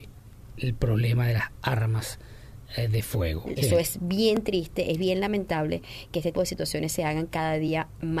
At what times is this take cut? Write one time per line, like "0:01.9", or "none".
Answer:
0:03.6
0:06.3